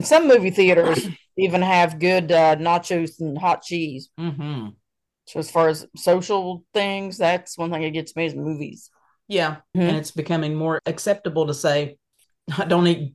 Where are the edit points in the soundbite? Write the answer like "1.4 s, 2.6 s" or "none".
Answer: 9.7 s, 10.8 s